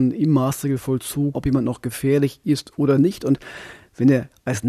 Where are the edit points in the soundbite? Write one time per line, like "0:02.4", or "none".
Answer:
0:01.3